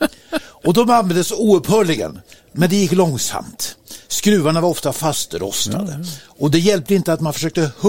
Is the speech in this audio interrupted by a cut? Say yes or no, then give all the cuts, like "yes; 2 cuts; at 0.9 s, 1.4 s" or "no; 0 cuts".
no; 0 cuts